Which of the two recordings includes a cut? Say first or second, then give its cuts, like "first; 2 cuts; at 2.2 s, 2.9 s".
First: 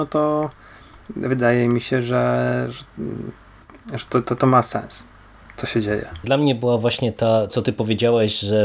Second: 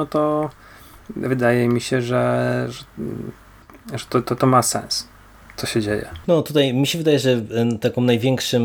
first; 2 cuts; at 6.2 s, 7.5 s